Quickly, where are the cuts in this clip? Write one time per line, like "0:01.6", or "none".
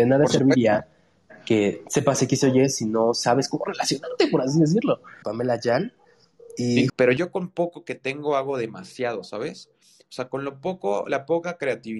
0:05.2
0:06.9